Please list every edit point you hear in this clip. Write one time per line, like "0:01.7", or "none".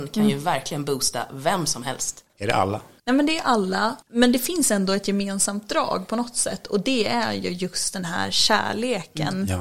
0:02.3